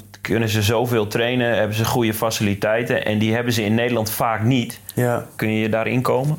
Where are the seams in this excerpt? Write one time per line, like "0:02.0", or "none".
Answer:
0:05.4